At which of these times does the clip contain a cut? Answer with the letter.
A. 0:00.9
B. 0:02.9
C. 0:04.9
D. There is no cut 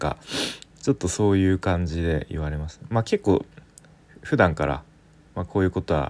D